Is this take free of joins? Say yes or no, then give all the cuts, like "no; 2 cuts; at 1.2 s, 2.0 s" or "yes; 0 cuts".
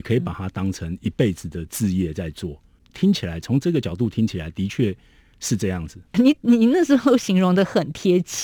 no; 1 cut; at 6.1 s